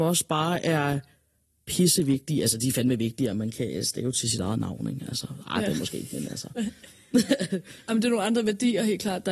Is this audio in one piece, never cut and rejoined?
yes; 0 cuts

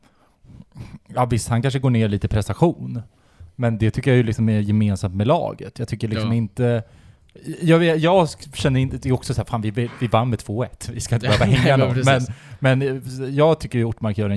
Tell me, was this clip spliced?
no; 0 cuts

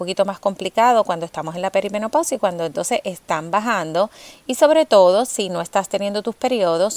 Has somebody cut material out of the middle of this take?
no; 0 cuts

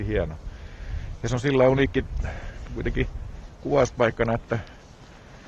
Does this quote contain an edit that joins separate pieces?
no; 0 cuts

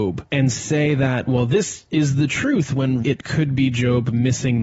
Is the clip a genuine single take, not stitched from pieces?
no; 1 cut; at 3.0 s

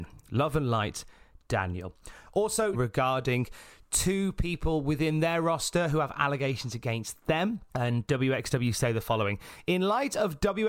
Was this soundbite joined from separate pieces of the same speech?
yes; 2 cuts; at 2.7 s, 7.7 s

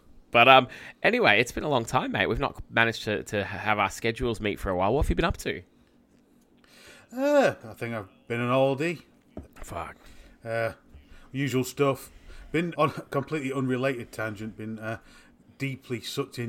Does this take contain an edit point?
yes; 2 cuts; at 9.4 s, 12.7 s

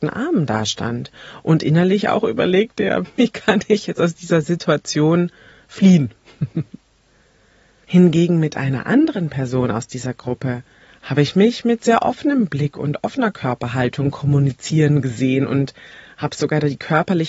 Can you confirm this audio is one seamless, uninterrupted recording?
no; 1 cut; at 3.0 s

